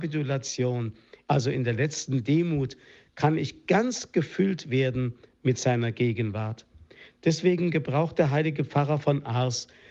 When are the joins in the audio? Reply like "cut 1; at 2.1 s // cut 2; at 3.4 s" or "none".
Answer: cut 1; at 1.3 s

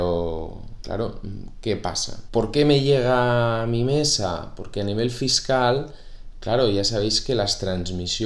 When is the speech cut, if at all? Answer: cut 1; at 2.3 s

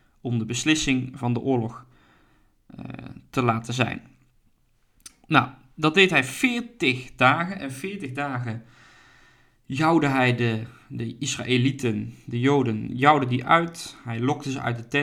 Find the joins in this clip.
none

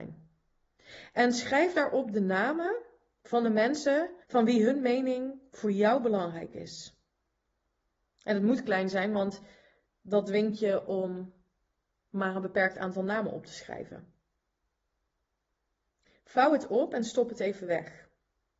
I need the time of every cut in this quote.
cut 1; at 4.2 s

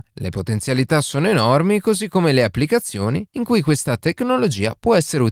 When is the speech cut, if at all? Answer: none

